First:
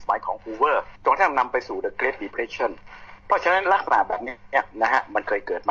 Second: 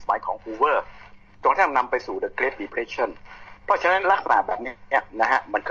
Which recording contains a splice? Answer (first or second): first